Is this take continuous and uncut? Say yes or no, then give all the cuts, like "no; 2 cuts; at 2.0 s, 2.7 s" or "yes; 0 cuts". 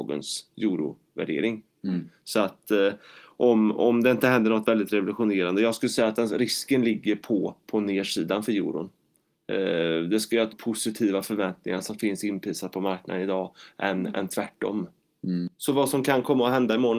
no; 1 cut; at 10.5 s